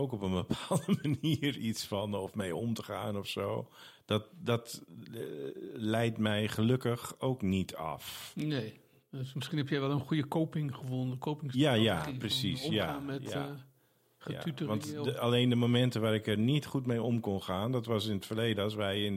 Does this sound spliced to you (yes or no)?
no